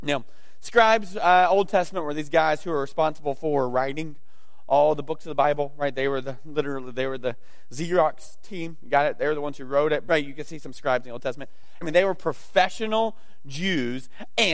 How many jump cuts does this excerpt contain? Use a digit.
2